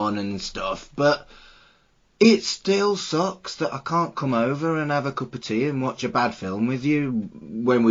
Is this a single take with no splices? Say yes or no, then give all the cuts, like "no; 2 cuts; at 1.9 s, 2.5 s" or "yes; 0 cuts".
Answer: yes; 0 cuts